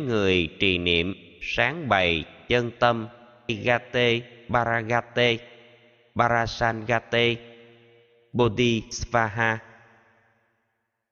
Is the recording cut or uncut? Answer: cut